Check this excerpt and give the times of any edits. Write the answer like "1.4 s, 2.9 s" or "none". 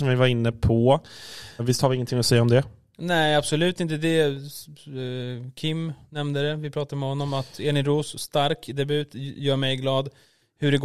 1.6 s